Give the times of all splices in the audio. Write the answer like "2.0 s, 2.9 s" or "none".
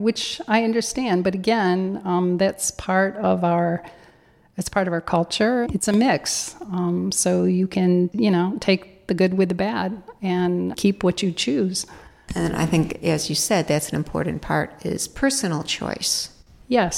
5.7 s